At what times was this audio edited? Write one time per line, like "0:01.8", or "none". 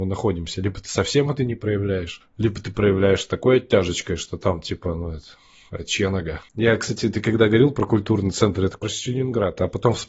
0:06.5
0:08.8